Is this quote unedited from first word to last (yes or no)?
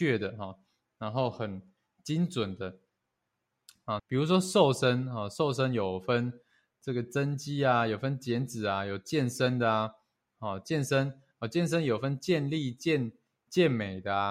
no